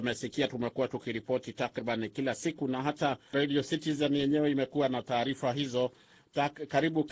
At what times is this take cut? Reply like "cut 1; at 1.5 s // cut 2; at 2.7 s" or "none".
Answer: cut 1; at 3.3 s